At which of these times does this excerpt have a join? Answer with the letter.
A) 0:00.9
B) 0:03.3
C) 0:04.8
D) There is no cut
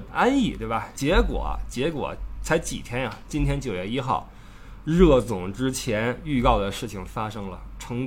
A